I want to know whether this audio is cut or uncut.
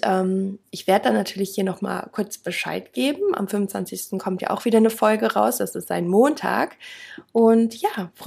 uncut